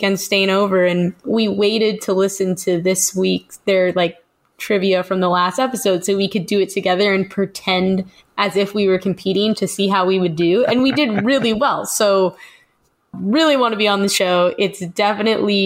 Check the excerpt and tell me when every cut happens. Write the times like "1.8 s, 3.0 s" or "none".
13.1 s